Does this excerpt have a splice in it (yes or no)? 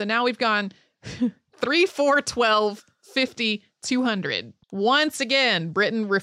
yes